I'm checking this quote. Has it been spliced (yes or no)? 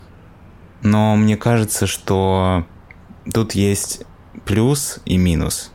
yes